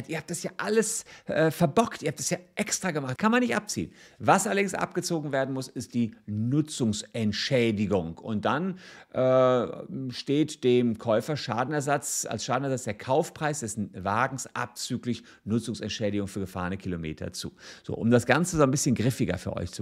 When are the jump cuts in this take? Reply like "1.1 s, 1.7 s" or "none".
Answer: 3.2 s